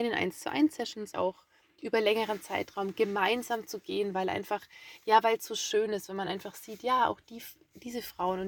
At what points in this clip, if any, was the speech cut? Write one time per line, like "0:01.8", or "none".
0:01.1